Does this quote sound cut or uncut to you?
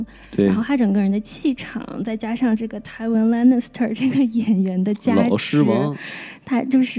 uncut